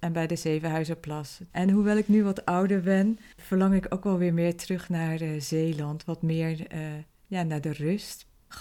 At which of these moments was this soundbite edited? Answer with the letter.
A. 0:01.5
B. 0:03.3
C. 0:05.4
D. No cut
A